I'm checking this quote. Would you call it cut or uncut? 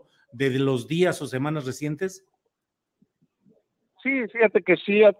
uncut